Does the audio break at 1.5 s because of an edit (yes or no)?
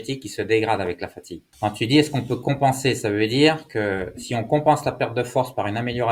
yes